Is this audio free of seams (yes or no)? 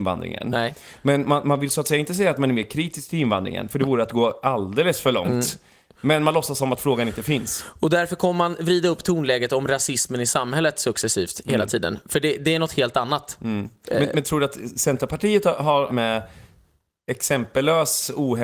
no